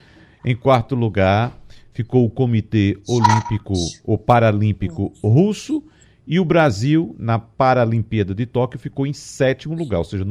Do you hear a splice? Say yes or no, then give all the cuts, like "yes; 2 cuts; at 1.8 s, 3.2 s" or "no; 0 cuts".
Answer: no; 0 cuts